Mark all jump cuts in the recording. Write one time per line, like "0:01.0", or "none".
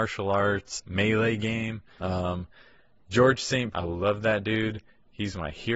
0:02.0
0:03.7